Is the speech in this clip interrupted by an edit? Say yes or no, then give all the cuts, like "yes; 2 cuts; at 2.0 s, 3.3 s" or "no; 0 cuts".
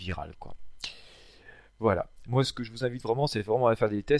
yes; 1 cut; at 2.2 s